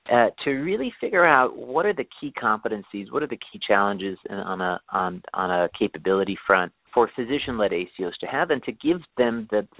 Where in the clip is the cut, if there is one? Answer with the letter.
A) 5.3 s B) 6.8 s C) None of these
B